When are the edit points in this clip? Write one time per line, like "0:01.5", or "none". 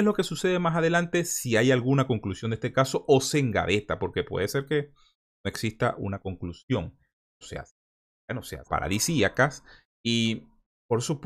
0:07.4
0:08.7